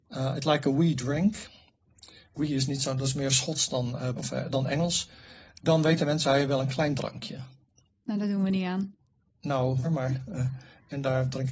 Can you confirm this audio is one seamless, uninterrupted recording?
no; 2 cuts; at 4.2 s, 9.8 s

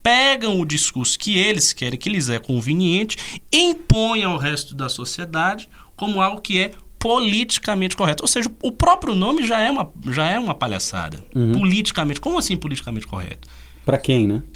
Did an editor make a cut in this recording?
no; 0 cuts

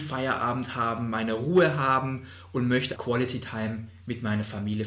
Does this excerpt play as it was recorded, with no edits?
no; 1 cut; at 3.0 s

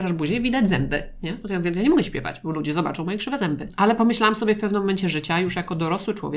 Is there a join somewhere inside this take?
no; 0 cuts

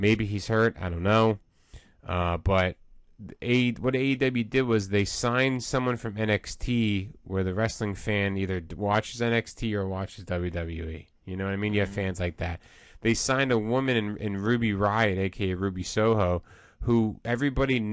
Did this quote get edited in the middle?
no; 0 cuts

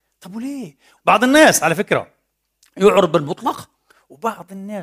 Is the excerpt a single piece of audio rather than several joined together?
no; 1 cut; at 1.0 s

